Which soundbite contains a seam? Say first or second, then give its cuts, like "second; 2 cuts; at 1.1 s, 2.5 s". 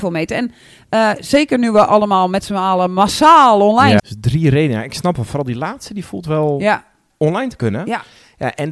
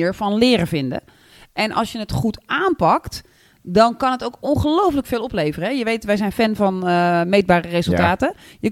first; 2 cuts; at 4.0 s, 7.1 s